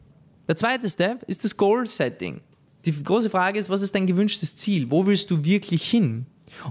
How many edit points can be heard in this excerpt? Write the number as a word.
zero